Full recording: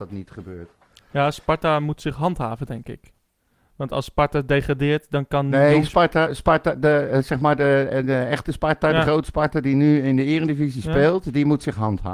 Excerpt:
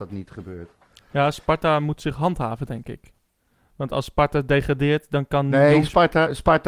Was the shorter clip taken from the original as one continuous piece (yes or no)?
yes